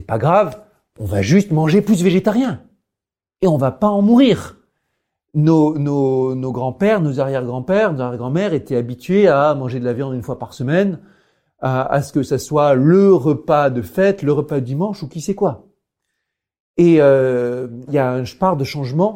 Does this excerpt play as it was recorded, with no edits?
no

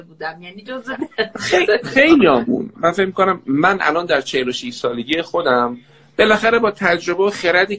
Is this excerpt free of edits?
yes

